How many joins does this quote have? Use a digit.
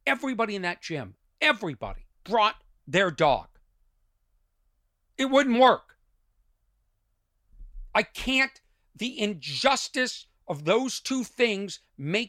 2